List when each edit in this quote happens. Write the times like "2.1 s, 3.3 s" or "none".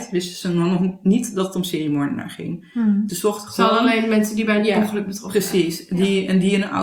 3.1 s